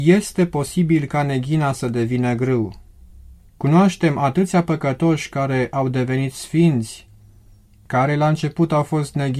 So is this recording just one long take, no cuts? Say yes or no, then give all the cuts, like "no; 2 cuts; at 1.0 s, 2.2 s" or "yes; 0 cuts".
no; 1 cut; at 3.4 s